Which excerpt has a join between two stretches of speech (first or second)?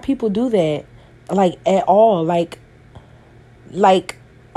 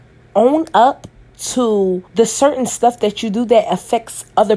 second